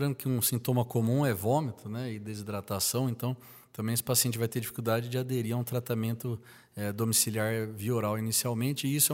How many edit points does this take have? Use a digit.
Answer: 0